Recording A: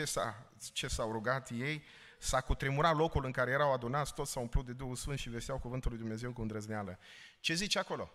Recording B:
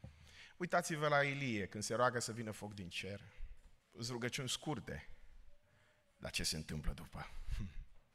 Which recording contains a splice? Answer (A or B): B